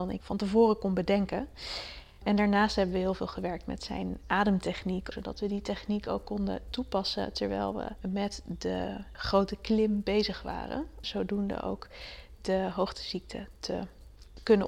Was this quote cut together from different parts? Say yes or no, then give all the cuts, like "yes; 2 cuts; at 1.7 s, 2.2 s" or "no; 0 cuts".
yes; 2 cuts; at 5.1 s, 11.0 s